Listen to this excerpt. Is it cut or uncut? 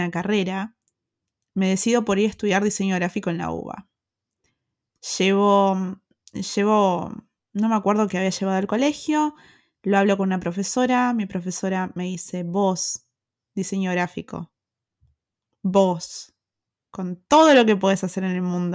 uncut